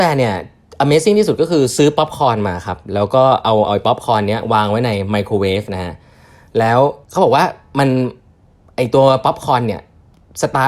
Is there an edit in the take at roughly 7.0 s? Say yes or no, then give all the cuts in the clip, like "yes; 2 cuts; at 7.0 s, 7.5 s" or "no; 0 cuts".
yes; 1 cut; at 7.0 s